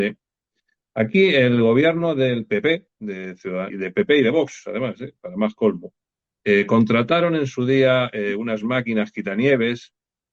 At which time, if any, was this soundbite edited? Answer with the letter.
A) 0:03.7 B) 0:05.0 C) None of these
A